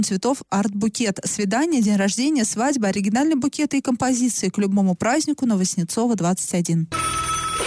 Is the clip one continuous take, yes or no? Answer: yes